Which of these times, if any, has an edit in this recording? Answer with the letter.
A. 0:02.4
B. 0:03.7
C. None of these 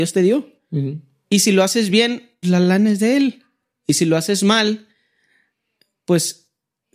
A